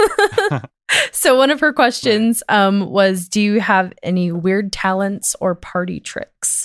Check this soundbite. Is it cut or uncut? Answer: uncut